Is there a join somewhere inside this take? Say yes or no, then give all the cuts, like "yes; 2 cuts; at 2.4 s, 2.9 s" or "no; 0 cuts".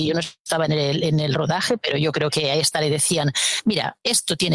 no; 0 cuts